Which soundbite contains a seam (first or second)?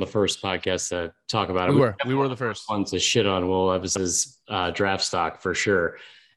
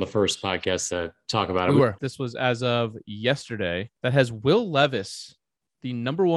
second